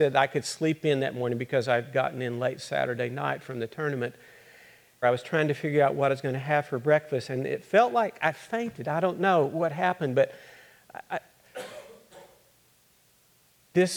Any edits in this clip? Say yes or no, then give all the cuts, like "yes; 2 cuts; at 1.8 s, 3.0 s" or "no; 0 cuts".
yes; 1 cut; at 5.0 s